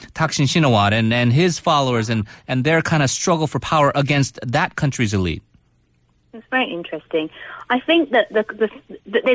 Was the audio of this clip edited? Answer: no; 0 cuts

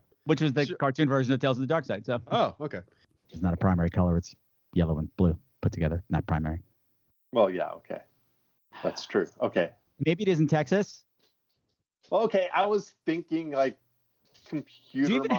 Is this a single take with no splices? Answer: no; 1 cut; at 3.1 s

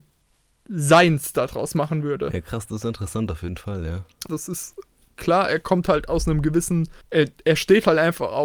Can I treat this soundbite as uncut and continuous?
no; 2 cuts; at 4.3 s, 7.0 s

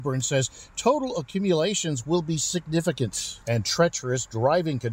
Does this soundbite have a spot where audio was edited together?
yes; 1 cut; at 3.4 s

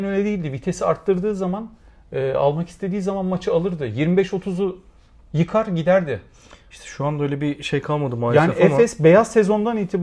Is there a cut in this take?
no; 0 cuts

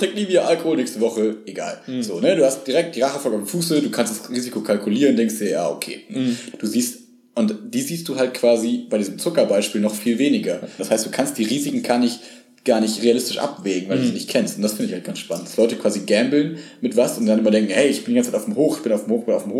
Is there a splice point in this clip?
yes; 2 cuts; at 6.5 s, 10.8 s

